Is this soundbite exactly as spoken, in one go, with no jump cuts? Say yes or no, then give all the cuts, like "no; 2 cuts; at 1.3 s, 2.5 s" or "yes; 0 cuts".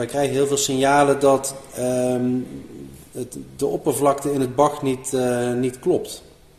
yes; 0 cuts